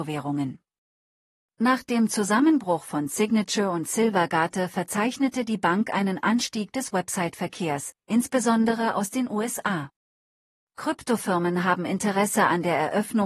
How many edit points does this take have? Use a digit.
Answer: 0